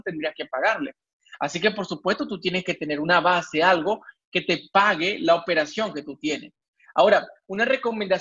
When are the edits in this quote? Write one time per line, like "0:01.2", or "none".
none